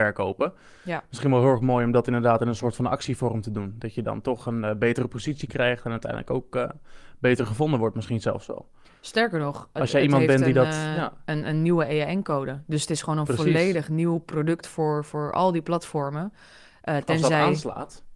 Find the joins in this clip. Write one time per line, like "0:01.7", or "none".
none